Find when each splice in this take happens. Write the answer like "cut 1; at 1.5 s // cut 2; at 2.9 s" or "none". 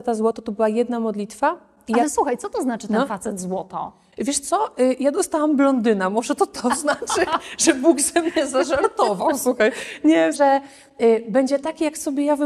cut 1; at 10.3 s